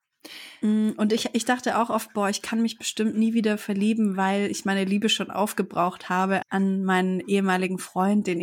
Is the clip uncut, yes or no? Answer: no